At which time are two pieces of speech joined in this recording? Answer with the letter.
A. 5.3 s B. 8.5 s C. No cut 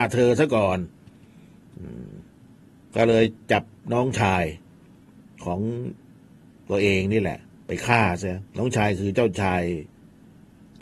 B